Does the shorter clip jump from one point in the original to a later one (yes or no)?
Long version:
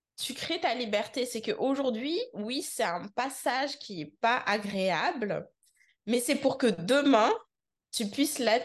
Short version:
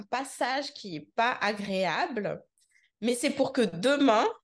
no